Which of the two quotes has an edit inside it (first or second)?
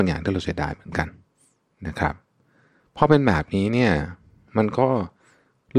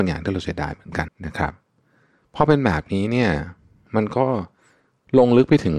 second